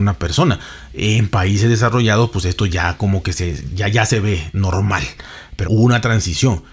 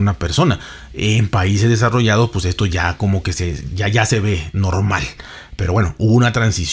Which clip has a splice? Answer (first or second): first